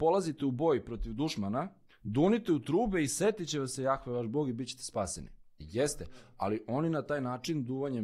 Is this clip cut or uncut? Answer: cut